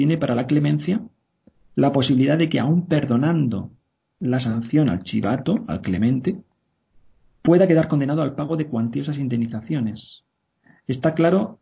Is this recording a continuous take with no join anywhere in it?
yes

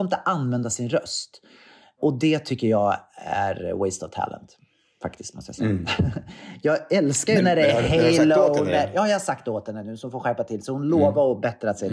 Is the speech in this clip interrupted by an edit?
no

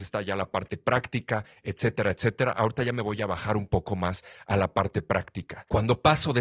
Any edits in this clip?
no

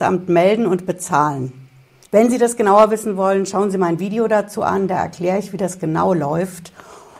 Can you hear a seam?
yes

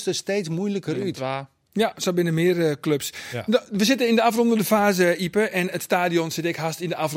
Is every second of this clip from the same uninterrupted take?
yes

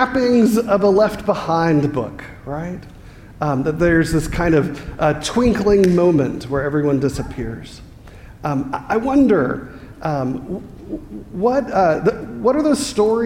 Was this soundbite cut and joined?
no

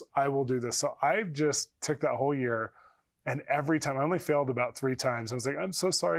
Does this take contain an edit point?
no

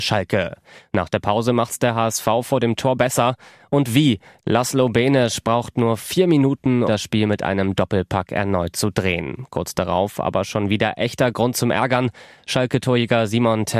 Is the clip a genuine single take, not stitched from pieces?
no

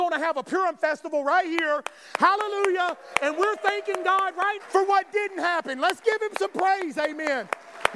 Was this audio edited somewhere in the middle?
yes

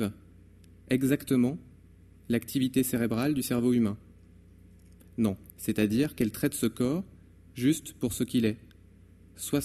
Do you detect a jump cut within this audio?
yes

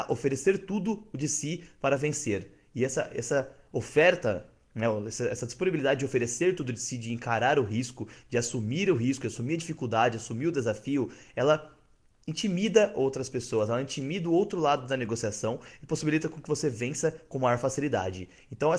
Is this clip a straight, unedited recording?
yes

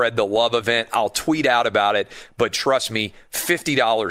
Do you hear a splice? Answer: no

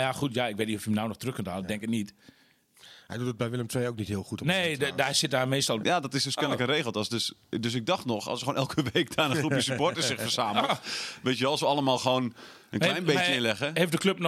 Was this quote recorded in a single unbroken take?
no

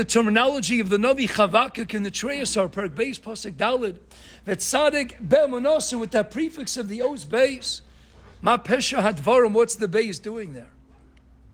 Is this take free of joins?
yes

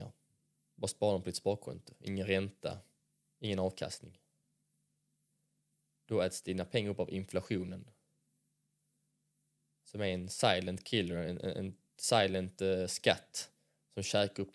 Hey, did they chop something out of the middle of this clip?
no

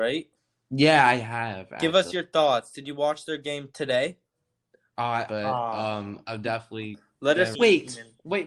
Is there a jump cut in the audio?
yes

